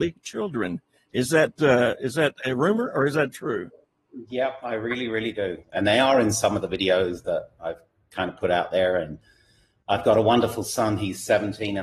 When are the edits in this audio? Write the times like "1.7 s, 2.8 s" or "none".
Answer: 5.6 s